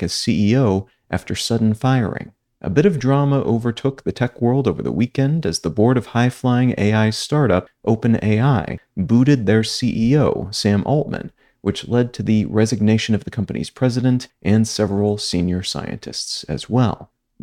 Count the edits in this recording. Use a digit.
0